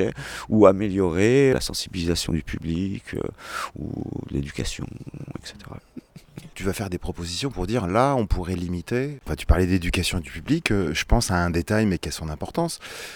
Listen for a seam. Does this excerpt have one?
yes; 3 cuts; at 1.5 s, 5.8 s, 9.2 s

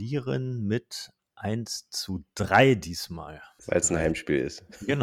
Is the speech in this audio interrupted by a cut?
no; 0 cuts

